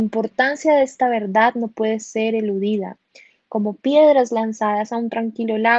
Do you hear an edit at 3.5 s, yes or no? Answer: no